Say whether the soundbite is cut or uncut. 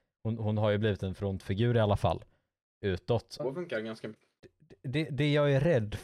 cut